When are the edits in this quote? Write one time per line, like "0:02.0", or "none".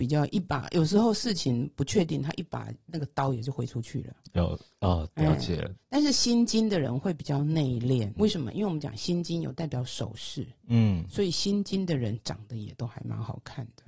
0:08.2